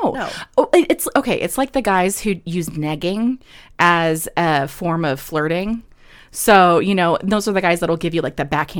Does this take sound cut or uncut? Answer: uncut